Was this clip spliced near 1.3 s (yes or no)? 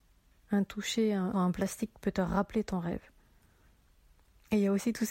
yes